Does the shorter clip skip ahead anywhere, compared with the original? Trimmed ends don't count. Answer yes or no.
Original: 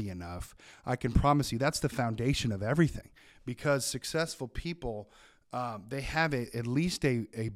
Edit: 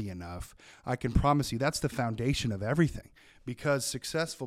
no